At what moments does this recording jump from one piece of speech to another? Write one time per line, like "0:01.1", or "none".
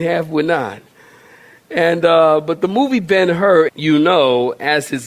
0:03.7